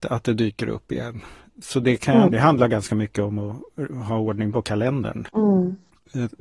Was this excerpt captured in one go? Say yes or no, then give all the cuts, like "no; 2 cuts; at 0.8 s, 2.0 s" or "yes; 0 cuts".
no; 2 cuts; at 2.3 s, 5.3 s